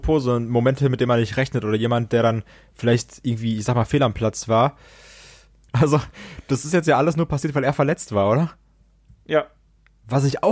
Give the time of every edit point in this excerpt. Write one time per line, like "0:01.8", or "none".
0:05.7

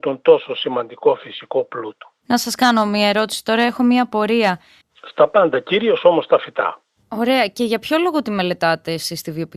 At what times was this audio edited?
0:04.8

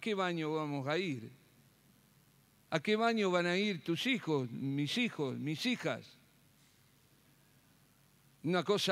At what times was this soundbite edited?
none

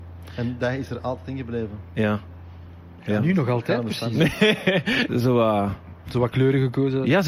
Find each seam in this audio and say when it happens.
0:03.0
0:05.1

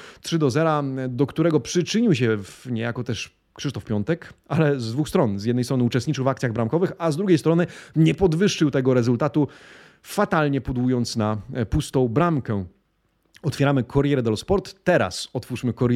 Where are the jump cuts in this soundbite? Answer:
none

